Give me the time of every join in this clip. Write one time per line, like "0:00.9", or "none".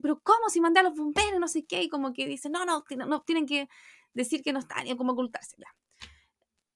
none